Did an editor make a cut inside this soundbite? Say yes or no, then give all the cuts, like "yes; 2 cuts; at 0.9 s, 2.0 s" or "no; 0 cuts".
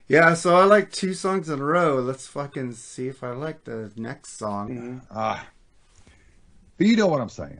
yes; 1 cut; at 4.7 s